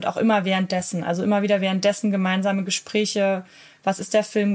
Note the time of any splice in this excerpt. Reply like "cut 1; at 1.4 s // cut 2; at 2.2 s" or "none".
none